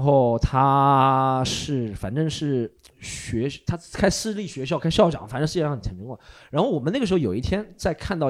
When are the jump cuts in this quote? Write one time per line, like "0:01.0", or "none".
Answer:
none